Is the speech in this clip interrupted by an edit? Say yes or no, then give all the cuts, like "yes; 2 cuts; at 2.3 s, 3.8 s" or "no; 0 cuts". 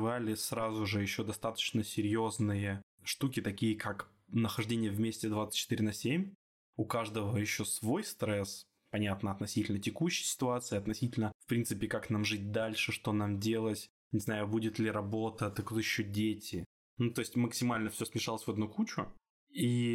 no; 0 cuts